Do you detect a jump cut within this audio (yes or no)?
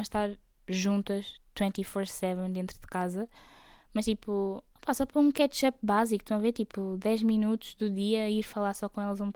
no